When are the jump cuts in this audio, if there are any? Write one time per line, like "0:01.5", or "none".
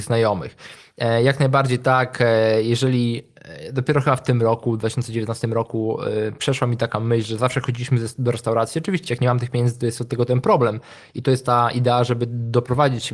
none